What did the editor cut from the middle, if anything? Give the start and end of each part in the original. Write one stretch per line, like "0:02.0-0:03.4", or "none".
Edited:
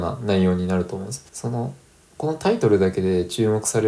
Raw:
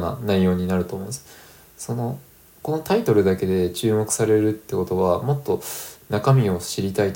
0:01.3-0:01.7